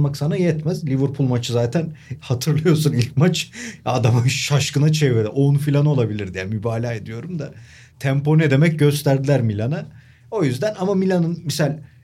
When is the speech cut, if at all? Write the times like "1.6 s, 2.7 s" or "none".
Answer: none